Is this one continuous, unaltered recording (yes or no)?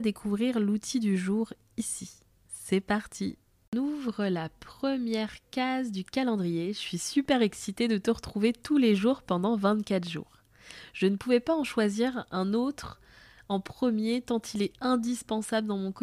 yes